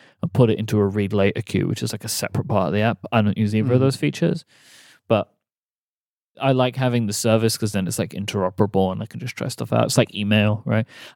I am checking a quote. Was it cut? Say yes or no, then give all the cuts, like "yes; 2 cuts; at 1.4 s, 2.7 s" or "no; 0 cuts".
no; 0 cuts